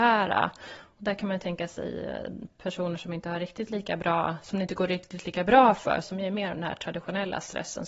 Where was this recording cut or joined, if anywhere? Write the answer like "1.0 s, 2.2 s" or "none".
6.0 s